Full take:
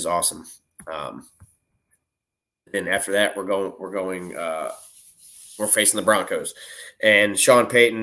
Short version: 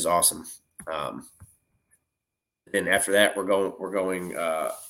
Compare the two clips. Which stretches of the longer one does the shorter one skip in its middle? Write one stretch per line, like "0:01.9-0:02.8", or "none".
none

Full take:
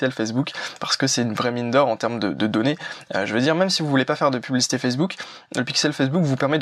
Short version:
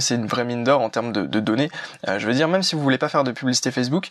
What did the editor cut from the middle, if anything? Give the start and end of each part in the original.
none

